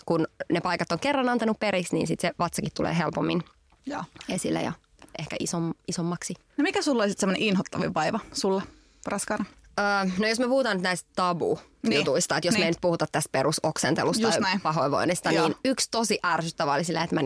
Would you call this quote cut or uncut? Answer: uncut